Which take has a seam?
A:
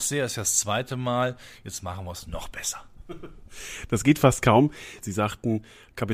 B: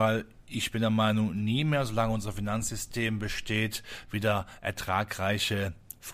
A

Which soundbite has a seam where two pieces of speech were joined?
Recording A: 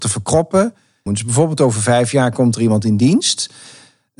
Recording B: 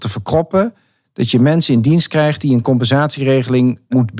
A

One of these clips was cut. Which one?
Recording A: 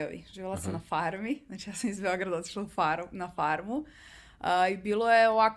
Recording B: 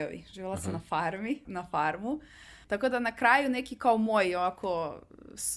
B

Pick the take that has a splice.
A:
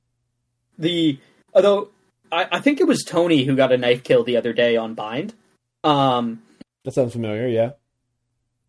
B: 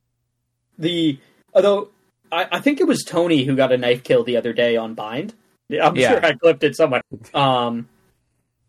B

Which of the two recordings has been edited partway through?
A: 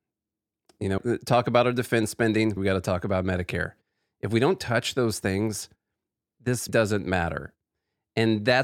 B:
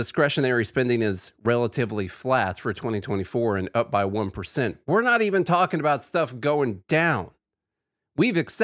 A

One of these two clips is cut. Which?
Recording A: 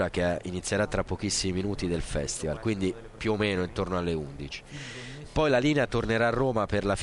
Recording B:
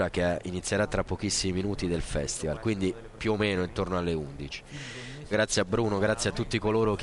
B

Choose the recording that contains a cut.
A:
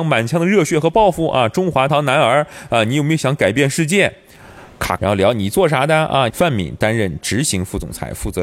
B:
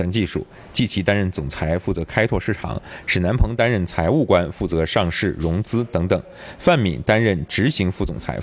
A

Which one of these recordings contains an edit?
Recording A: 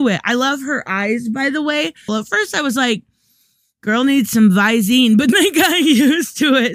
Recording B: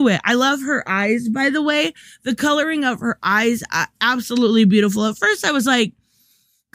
A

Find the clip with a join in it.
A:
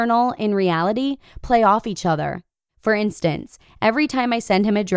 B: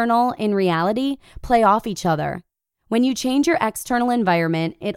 A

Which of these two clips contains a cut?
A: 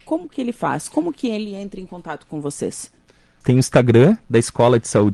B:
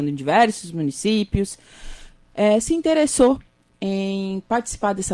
A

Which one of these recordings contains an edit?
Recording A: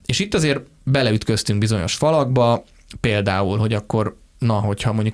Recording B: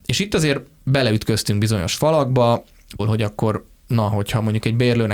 B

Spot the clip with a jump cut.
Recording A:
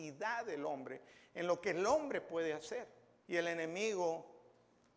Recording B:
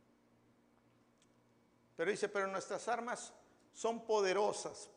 A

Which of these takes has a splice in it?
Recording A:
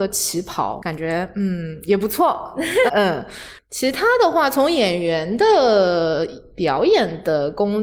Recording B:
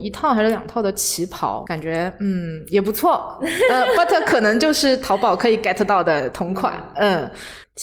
A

